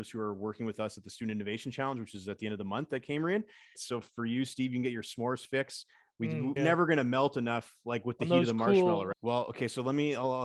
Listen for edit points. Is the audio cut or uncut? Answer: cut